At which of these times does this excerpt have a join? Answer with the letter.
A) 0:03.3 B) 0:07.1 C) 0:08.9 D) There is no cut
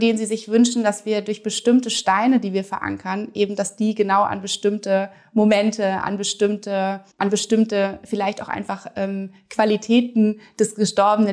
B